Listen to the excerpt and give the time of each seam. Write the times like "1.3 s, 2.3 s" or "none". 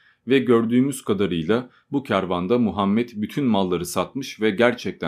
none